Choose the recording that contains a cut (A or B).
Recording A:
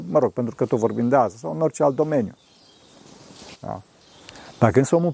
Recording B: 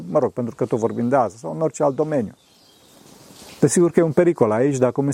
A